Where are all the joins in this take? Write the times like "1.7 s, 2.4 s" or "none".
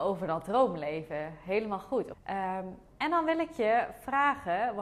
2.1 s